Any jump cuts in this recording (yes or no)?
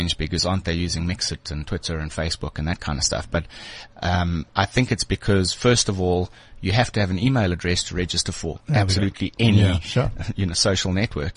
no